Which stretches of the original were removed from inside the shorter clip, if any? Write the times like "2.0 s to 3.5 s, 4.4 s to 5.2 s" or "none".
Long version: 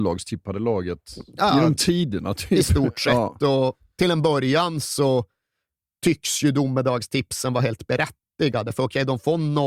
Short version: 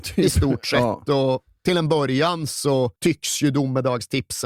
5.3 s to 6.0 s